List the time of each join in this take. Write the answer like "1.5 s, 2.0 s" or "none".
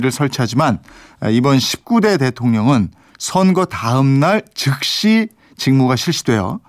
none